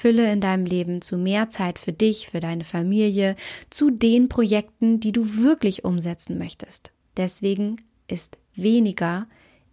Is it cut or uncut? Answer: uncut